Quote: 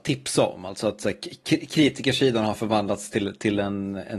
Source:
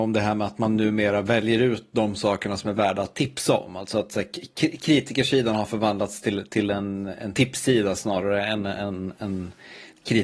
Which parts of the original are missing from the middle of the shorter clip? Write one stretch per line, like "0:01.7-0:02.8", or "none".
none